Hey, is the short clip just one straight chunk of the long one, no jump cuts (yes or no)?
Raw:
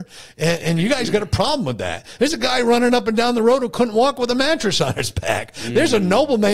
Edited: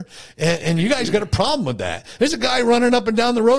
yes